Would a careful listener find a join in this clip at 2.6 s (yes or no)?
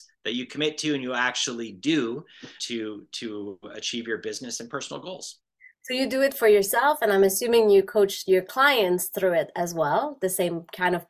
yes